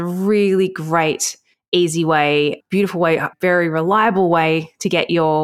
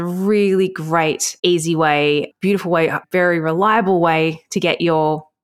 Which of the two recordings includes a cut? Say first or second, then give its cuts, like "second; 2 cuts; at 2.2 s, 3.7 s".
second; 1 cut; at 1.4 s